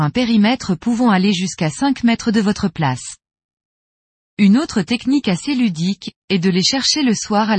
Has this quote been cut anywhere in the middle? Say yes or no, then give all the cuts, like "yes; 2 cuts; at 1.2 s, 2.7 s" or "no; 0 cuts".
no; 0 cuts